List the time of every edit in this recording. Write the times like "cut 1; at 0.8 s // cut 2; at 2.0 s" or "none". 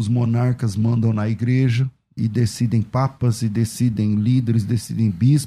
cut 1; at 2.2 s